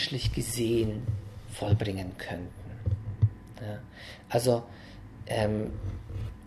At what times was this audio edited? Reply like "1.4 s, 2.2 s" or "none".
none